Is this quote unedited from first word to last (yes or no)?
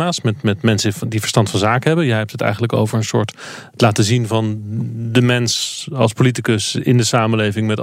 yes